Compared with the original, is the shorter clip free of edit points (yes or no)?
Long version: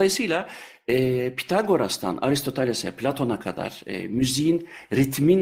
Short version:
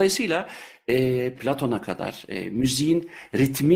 no